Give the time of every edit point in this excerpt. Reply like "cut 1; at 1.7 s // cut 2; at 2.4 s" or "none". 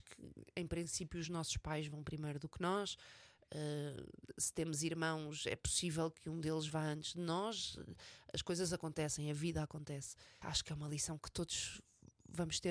cut 1; at 10.4 s